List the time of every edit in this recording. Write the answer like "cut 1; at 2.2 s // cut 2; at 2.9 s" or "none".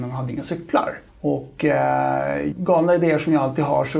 cut 1; at 1.1 s // cut 2; at 2.5 s